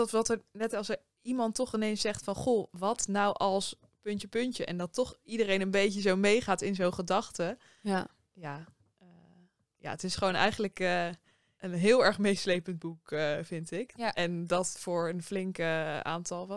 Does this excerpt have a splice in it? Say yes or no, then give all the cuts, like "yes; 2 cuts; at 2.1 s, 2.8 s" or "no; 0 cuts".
yes; 1 cut; at 4.3 s